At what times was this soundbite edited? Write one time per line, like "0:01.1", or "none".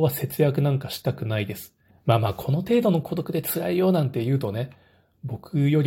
0:01.9